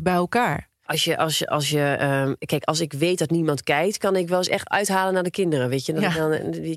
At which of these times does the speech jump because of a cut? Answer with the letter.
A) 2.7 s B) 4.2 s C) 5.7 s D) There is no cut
D